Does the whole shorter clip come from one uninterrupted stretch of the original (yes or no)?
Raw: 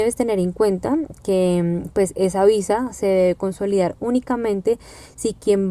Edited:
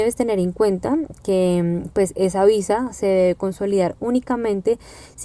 yes